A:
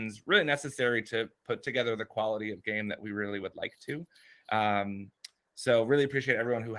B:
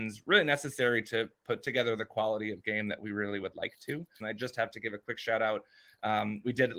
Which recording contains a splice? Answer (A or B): B